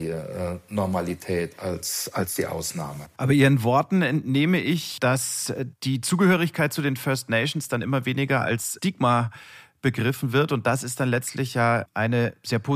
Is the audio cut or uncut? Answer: uncut